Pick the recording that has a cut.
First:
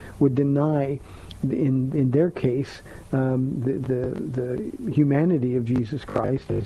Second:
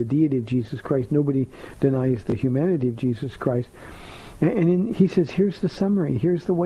second; 1 cut; at 4.9 s

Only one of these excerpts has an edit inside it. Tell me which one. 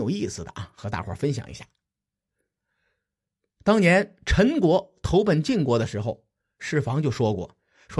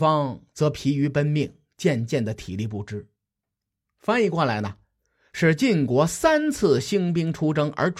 second; 1 cut; at 3.4 s

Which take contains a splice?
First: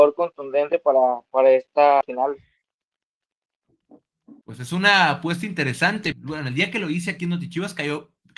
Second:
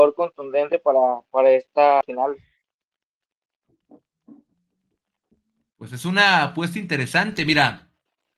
first; 2 cuts; at 4.4 s, 6.1 s

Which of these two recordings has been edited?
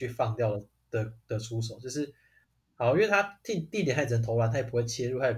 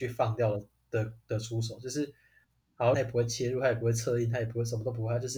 second; 1 cut; at 2.9 s

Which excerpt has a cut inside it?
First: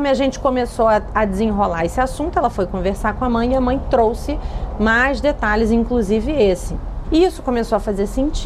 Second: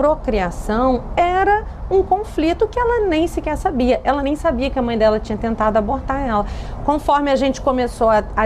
first; 1 cut; at 7.0 s

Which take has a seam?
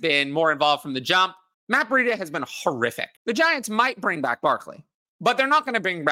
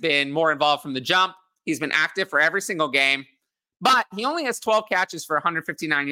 first; 2 cuts; at 1.5 s, 3.2 s

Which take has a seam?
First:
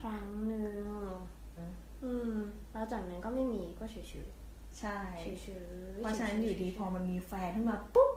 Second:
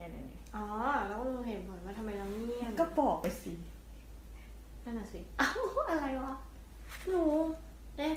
first; 1 cut; at 1.6 s

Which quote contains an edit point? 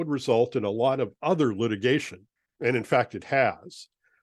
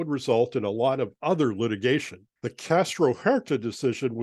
second; 1 cut; at 2.4 s

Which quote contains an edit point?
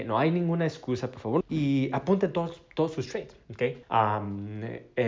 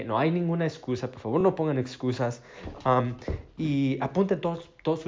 first; 2 cuts; at 1.4 s, 3.8 s

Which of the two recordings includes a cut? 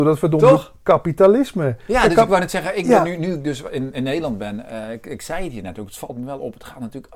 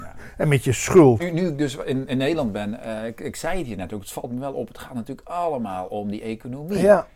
second; 1 cut; at 1.2 s

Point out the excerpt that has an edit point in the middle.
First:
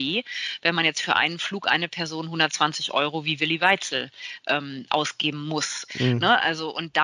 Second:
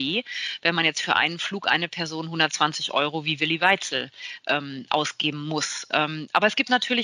first; 1 cut; at 5.9 s

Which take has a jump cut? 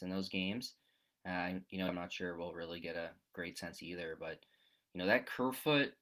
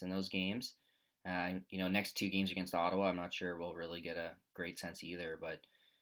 first; 1 cut; at 1.9 s

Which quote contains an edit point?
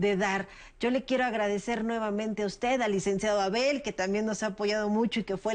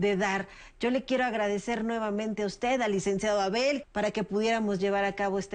second; 1 cut; at 3.8 s

